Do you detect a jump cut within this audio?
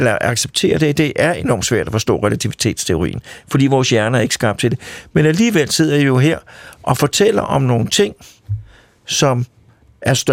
no; 0 cuts

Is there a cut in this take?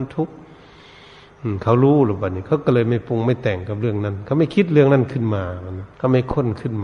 yes; 1 cut; at 5.9 s

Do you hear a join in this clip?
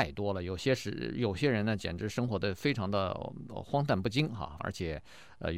yes; 1 cut; at 4.6 s

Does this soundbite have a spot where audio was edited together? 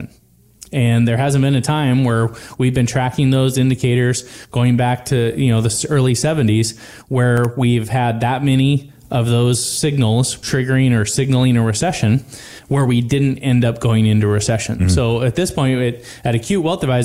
no; 0 cuts

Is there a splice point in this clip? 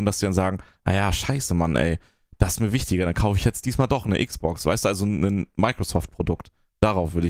no; 0 cuts

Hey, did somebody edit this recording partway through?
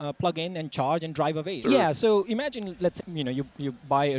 yes; 2 cuts; at 1.6 s, 3.0 s

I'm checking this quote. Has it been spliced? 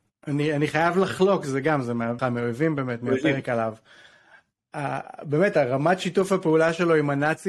yes; 1 cut; at 2.2 s

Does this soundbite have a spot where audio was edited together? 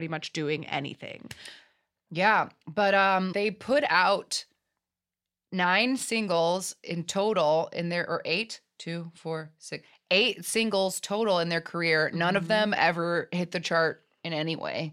yes; 1 cut; at 3.3 s

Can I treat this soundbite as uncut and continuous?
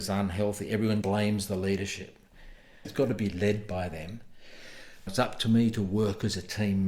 no; 3 cuts; at 1.0 s, 2.8 s, 5.1 s

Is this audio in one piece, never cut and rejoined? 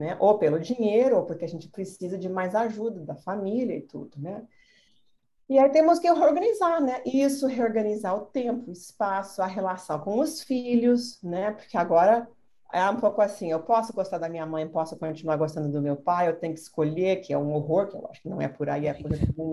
yes; 0 cuts

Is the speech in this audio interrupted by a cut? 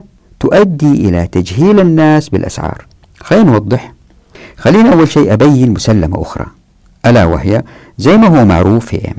no; 0 cuts

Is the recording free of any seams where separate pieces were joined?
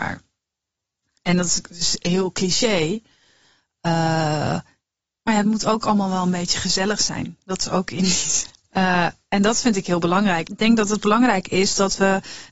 no; 2 cuts; at 8.7 s, 10.4 s

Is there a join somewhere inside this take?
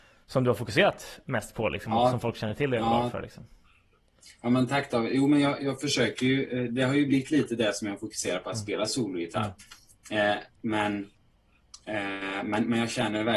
no; 0 cuts

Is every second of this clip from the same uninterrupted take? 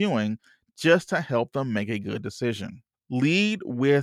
no; 1 cut; at 2.9 s

